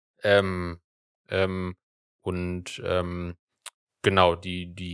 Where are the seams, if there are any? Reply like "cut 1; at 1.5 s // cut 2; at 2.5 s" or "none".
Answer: cut 1; at 1.1 s